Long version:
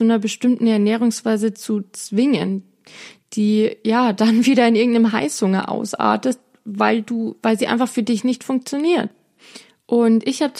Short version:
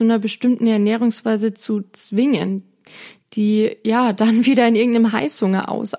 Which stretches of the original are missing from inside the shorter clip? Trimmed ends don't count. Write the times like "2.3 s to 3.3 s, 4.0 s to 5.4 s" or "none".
none